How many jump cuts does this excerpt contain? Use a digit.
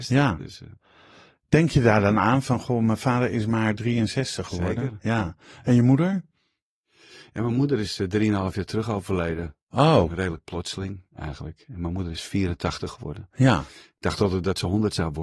0